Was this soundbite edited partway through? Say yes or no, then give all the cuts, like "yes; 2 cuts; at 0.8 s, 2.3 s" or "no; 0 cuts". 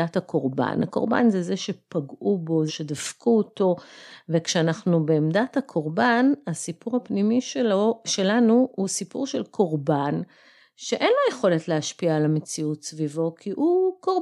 yes; 1 cut; at 2.7 s